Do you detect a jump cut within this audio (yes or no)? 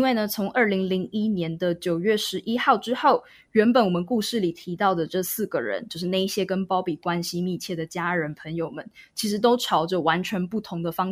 no